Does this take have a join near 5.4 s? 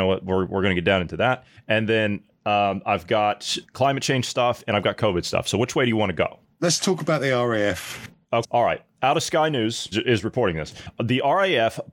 no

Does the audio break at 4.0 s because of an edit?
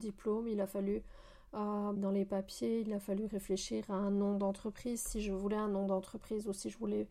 no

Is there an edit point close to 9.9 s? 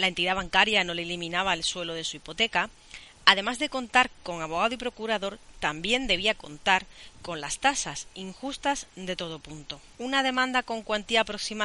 yes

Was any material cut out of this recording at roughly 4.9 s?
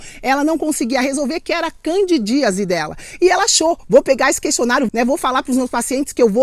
yes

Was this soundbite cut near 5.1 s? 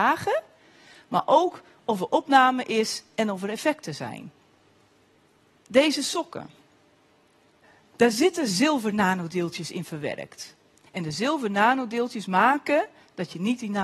no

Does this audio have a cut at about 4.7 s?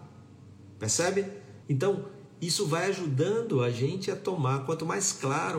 no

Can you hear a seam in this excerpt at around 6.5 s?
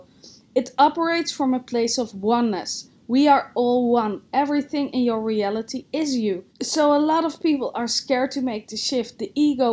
yes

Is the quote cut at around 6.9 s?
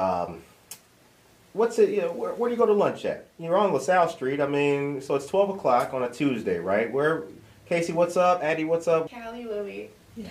no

